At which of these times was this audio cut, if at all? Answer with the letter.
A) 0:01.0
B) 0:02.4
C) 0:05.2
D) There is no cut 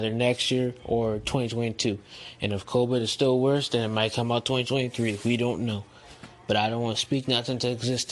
D